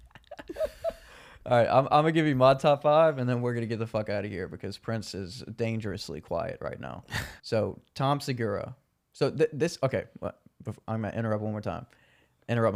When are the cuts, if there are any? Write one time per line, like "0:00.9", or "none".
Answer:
0:07.4